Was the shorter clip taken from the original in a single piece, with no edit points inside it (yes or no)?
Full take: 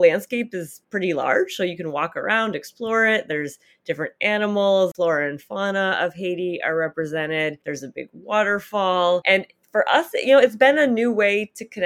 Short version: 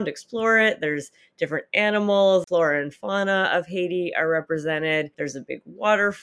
yes